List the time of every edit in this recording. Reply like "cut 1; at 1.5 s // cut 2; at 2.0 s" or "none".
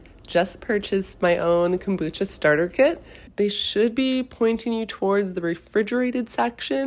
cut 1; at 3.3 s